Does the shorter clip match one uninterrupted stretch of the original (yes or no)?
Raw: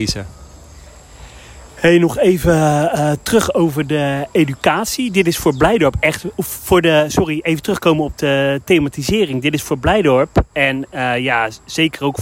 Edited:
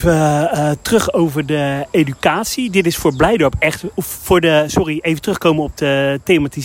yes